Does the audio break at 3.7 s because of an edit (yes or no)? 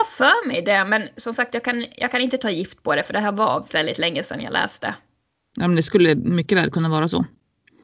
yes